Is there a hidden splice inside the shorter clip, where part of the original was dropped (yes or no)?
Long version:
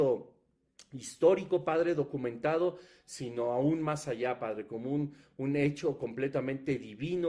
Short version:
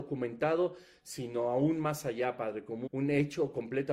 yes